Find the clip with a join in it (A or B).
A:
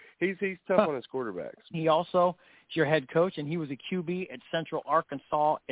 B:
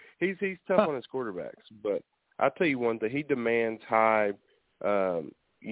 A